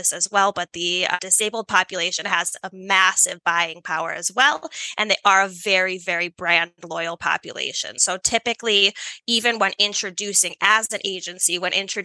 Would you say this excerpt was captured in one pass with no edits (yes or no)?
yes